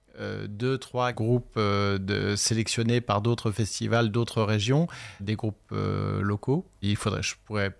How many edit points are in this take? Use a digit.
3